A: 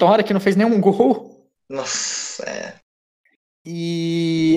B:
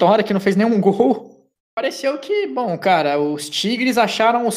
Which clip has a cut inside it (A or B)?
B